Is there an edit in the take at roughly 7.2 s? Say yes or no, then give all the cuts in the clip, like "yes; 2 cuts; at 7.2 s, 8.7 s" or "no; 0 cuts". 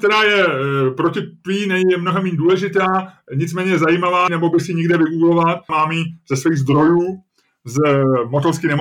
no; 2 cuts; at 4.3 s, 5.7 s